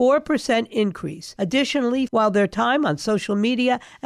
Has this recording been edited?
yes; 1 cut; at 2.1 s

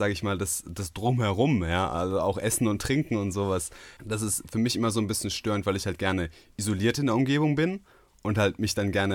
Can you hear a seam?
yes; 1 cut; at 4.0 s

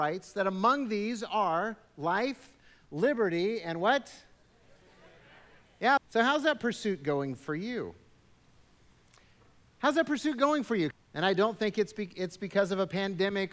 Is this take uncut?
no; 2 cuts; at 6.0 s, 10.9 s

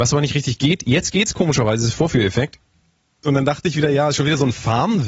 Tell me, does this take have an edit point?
yes; 1 cut; at 3.2 s

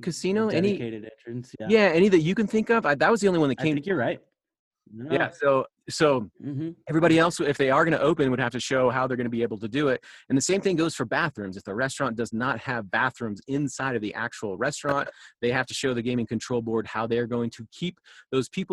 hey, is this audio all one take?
yes; 0 cuts

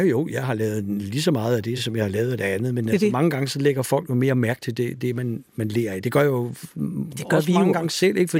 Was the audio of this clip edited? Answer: no; 0 cuts

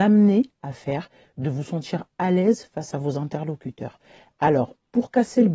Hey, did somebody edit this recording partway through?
no; 0 cuts

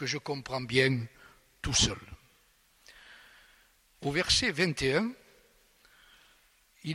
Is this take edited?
yes; 1 cut; at 3.9 s

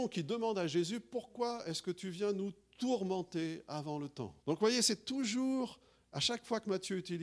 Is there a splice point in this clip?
yes; 1 cut; at 4.4 s

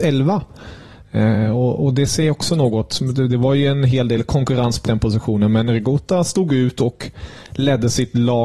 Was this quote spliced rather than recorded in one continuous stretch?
yes; 1 cut; at 4.8 s

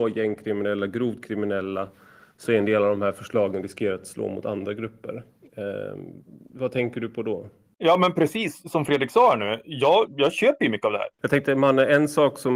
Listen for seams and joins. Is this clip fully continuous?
no; 1 cut; at 11.1 s

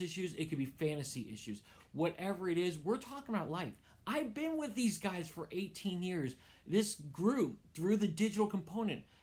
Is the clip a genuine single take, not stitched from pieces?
yes; 0 cuts

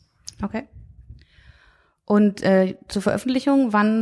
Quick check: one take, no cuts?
yes; 0 cuts

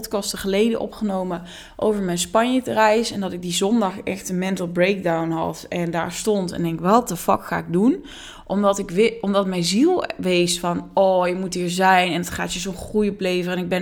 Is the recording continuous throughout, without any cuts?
yes; 0 cuts

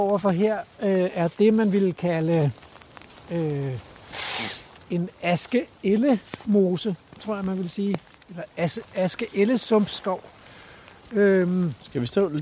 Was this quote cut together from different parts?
no; 0 cuts

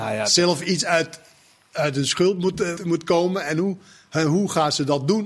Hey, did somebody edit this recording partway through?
yes; 1 cut; at 2.8 s

